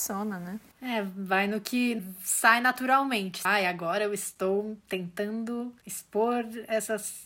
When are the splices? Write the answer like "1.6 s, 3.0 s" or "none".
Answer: 3.4 s